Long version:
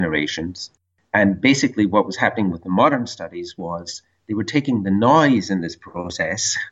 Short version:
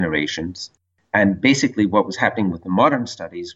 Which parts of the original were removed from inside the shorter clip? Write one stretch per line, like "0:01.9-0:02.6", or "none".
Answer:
none